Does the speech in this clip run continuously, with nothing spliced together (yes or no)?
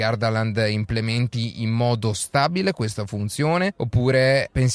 yes